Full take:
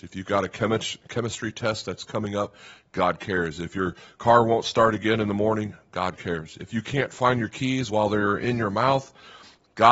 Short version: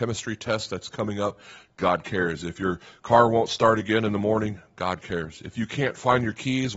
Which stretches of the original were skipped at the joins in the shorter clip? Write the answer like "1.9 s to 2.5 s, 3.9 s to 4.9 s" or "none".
none